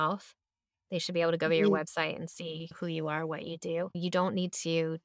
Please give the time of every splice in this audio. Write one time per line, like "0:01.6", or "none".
none